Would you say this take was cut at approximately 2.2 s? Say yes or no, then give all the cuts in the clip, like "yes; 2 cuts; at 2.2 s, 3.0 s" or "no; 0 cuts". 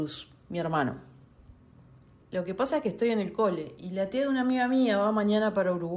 yes; 1 cut; at 2.2 s